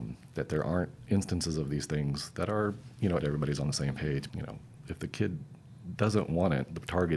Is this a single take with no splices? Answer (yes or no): no